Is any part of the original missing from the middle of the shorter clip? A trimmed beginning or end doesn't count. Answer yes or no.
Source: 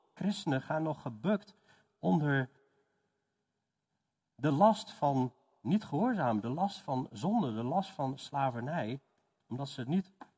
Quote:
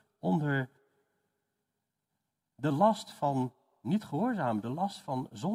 no